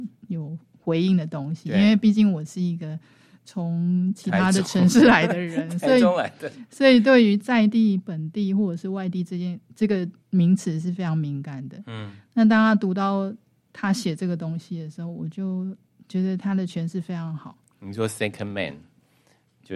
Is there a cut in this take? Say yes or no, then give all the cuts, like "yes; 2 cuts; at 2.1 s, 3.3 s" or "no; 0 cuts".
yes; 1 cut; at 10.2 s